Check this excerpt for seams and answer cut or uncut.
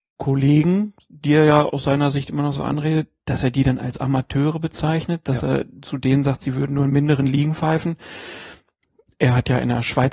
uncut